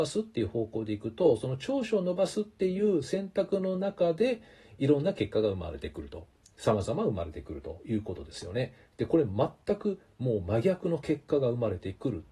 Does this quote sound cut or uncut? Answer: uncut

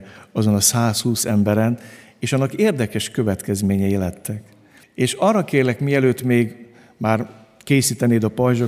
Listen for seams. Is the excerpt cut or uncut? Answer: cut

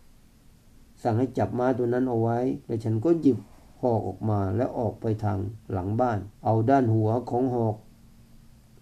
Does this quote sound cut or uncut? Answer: cut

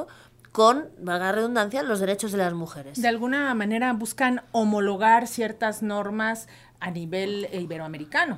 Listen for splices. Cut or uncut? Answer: uncut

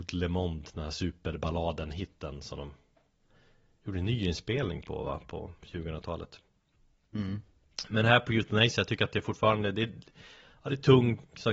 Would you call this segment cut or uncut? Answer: cut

